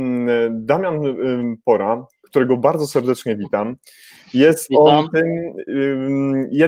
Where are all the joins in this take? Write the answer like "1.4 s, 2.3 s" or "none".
none